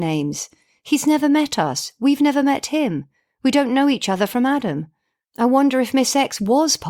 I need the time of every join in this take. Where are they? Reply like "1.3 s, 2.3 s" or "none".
5.2 s